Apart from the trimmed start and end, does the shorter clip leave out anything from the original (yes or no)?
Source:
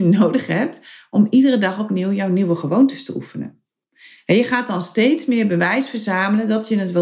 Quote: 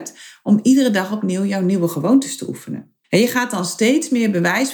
yes